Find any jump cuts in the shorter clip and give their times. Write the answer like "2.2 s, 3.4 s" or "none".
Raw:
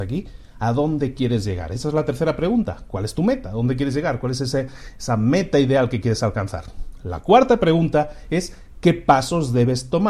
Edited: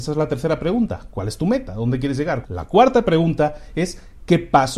2.4 s